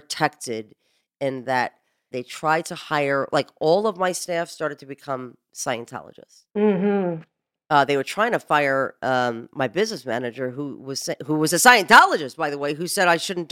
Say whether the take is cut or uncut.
cut